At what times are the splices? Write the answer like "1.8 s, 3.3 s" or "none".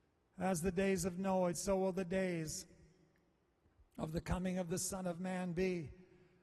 1.5 s